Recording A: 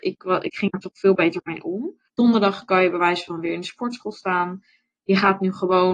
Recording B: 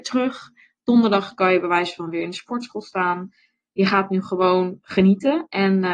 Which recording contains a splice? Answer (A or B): A